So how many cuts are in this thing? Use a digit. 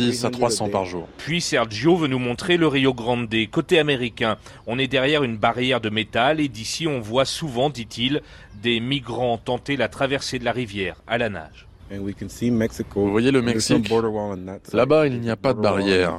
0